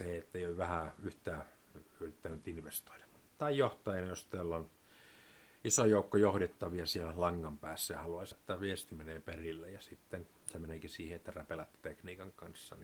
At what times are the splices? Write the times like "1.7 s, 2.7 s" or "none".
8.3 s